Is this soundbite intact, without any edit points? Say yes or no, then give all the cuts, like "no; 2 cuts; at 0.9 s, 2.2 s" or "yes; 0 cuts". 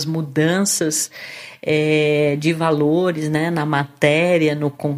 yes; 0 cuts